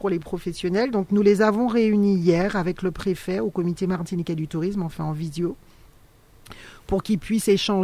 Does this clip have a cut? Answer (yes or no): no